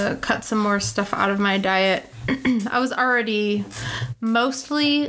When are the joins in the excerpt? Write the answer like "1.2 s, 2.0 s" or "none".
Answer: none